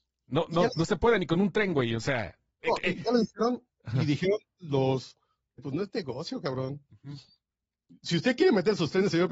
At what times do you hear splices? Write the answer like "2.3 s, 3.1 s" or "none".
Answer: 5.6 s